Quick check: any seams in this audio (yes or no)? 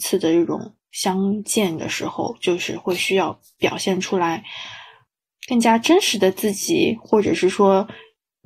no